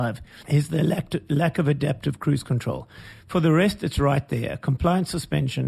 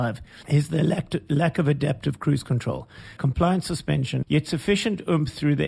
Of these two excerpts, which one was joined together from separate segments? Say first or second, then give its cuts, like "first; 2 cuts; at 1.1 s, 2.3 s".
second; 2 cuts; at 3.2 s, 4.2 s